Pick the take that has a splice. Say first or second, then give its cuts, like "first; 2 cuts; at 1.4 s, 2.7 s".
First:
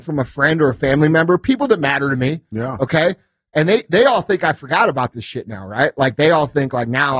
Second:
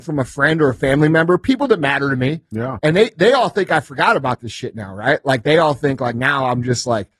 second; 1 cut; at 2.8 s